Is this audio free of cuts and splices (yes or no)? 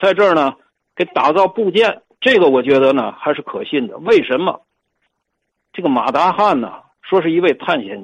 no